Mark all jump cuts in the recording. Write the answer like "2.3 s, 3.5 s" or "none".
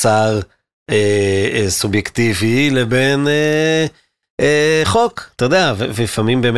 none